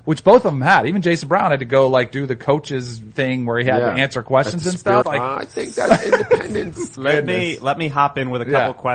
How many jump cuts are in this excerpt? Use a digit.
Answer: 2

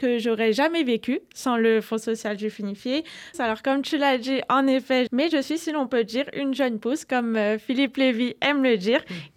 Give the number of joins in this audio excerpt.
2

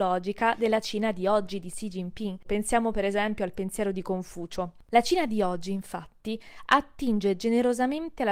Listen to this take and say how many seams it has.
1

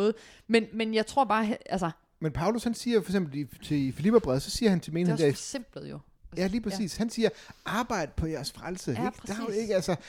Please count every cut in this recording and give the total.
0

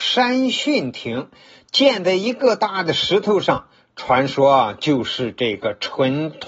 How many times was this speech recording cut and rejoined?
1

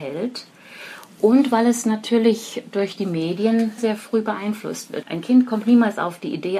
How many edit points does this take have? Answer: 2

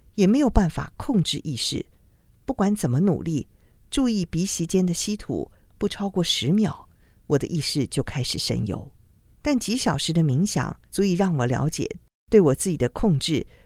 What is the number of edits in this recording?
2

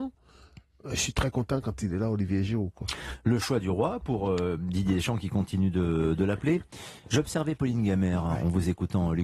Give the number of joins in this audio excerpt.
0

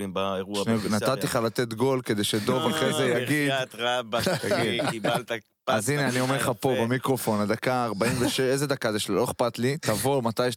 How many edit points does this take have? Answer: 0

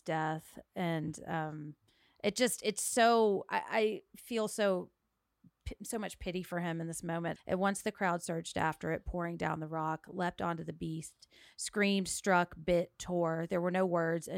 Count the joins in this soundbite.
1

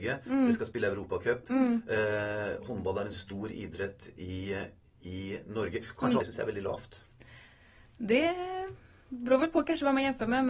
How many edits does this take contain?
1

